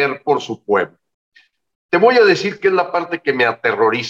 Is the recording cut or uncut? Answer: uncut